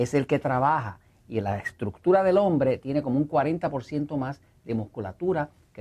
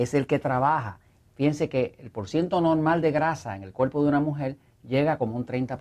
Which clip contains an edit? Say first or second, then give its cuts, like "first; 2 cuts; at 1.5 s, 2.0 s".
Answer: second; 1 cut; at 1.2 s